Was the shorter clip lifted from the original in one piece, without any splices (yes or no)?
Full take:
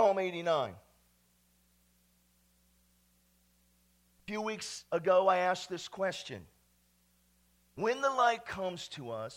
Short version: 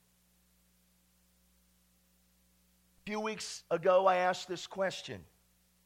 yes